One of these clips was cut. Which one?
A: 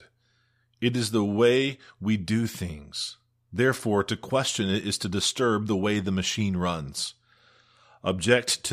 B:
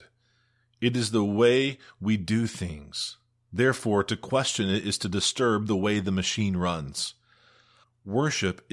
B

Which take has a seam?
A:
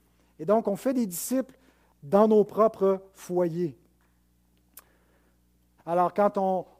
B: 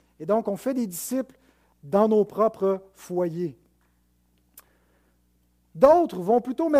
A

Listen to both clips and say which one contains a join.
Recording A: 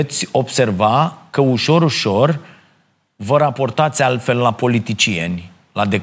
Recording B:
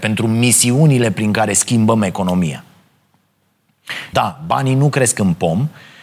B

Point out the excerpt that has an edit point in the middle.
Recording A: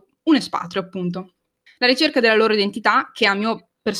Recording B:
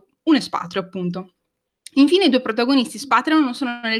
A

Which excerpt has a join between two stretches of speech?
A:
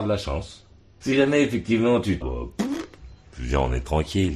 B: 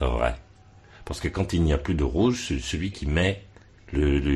A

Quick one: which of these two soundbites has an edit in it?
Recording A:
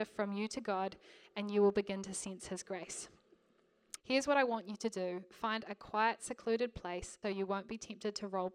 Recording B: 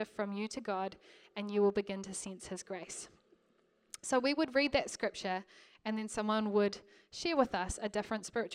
A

